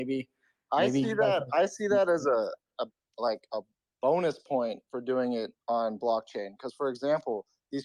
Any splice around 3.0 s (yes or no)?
no